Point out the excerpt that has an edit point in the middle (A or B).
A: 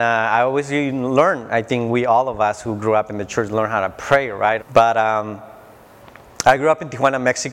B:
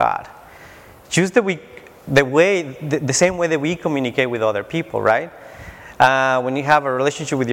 A